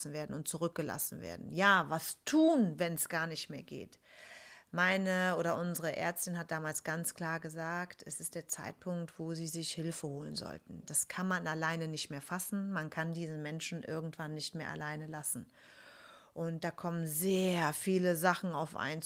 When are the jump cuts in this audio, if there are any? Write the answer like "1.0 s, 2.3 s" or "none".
none